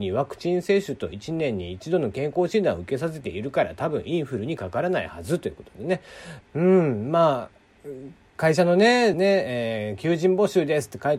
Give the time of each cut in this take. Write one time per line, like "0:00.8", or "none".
0:06.4
0:09.1